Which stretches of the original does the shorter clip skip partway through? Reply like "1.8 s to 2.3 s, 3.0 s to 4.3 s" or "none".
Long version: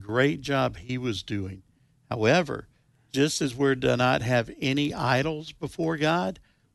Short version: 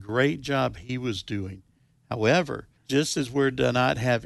2.8 s to 3.0 s